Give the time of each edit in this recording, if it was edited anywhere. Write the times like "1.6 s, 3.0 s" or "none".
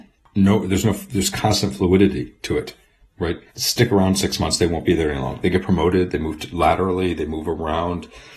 3.5 s